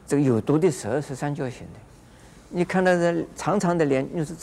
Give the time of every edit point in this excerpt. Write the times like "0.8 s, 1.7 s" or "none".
none

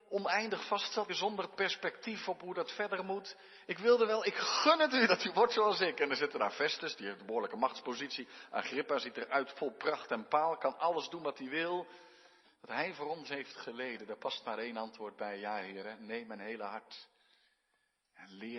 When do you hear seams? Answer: 1.1 s, 12.4 s

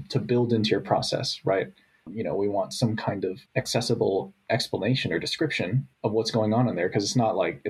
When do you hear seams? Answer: 2.1 s, 3.5 s, 5.9 s

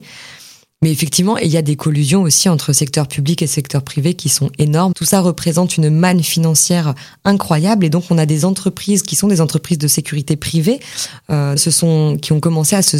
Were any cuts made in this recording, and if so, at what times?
4.9 s, 11.6 s

